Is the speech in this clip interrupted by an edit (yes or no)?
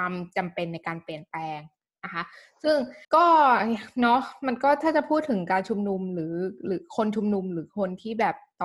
yes